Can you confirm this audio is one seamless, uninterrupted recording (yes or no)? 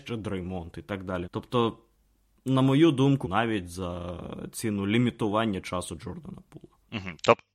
no